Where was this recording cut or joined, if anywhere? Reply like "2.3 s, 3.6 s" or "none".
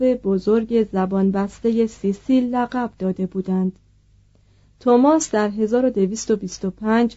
none

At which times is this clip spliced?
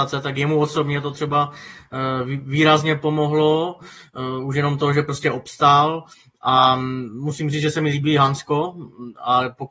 none

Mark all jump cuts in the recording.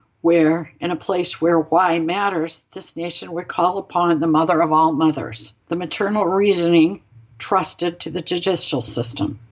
5.6 s

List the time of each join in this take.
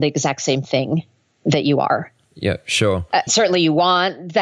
3.3 s

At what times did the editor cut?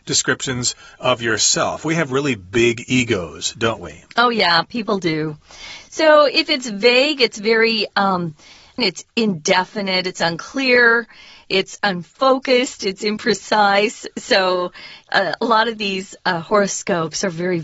4.1 s, 8.8 s

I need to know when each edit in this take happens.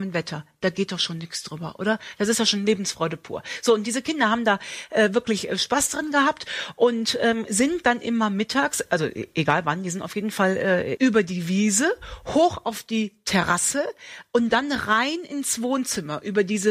11.0 s

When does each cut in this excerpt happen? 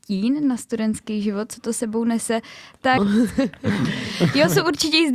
3.0 s

